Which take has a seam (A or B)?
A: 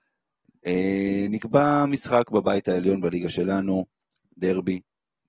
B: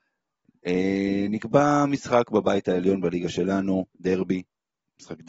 B